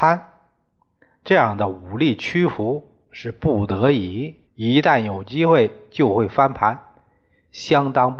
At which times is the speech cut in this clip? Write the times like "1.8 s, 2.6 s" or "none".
4.5 s